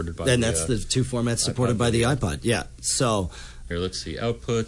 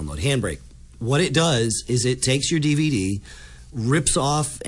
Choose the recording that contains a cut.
first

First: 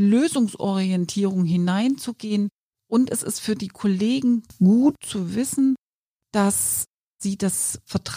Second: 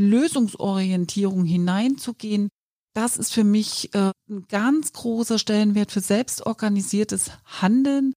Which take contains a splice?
first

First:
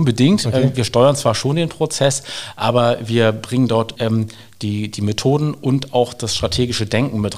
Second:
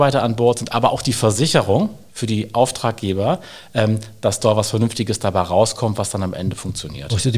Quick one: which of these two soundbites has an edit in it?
first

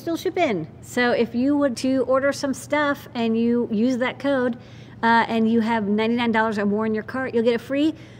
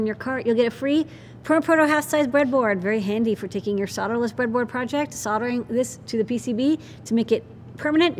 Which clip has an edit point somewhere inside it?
first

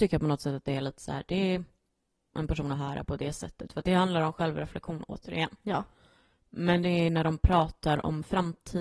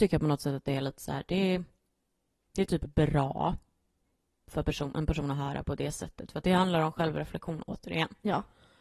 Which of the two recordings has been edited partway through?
first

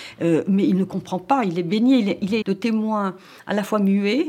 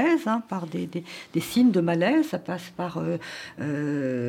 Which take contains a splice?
first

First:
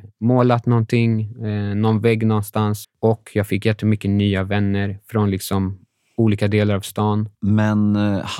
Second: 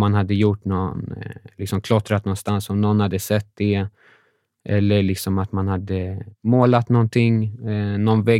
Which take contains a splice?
first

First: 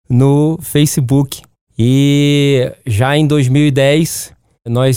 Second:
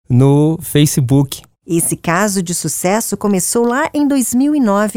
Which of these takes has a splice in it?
second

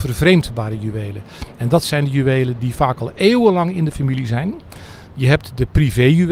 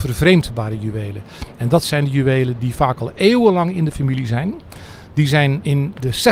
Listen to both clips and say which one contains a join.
first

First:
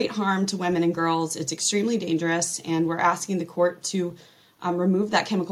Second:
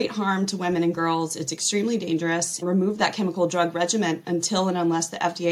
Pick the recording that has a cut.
second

